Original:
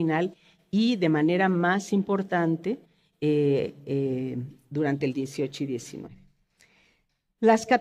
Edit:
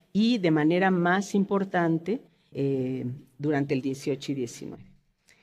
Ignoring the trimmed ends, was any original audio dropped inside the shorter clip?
yes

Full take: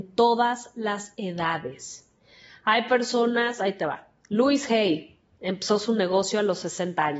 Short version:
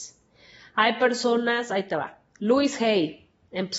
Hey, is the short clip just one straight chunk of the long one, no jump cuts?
yes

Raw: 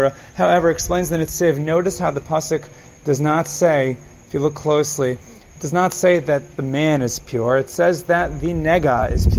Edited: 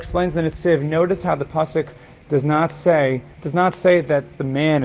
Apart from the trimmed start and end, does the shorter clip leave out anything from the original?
yes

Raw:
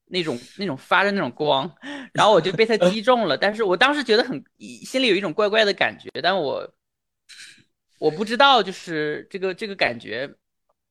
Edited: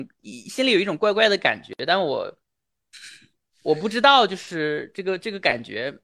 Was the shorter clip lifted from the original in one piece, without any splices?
yes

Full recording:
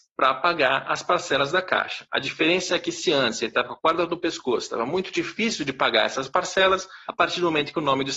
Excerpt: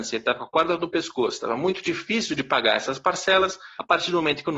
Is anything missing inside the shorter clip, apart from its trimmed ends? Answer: no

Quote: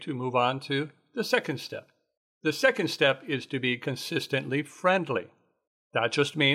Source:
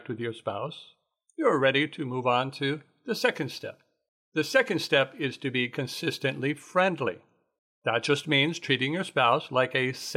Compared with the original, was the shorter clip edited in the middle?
no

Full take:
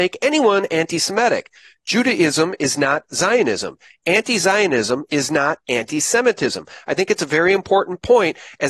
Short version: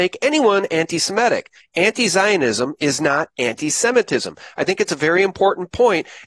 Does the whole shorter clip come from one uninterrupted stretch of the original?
no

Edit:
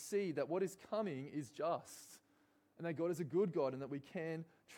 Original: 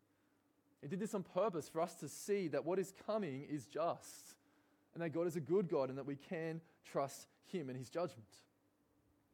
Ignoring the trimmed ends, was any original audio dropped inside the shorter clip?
no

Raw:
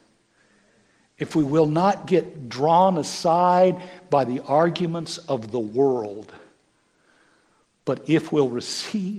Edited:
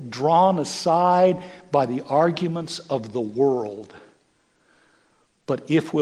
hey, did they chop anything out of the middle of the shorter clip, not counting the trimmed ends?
no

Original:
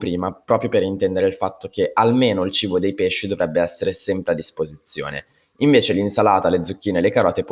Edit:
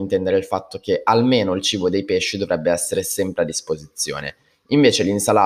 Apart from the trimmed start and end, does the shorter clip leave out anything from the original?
no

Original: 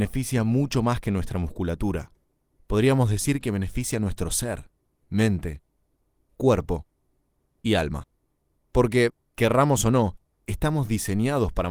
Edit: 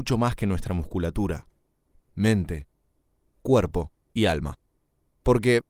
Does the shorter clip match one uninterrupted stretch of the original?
no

